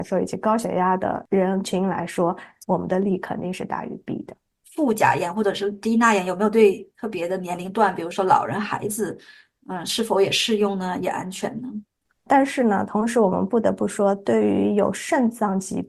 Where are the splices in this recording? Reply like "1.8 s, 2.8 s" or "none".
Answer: 12.3 s